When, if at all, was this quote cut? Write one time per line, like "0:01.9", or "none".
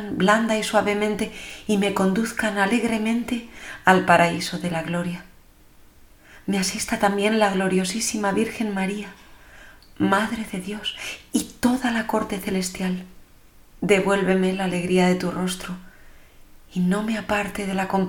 0:13.7